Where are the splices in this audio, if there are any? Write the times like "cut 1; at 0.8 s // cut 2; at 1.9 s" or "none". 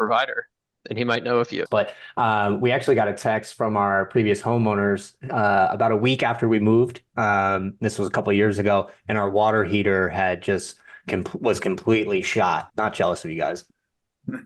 cut 1; at 1.7 s // cut 2; at 12.7 s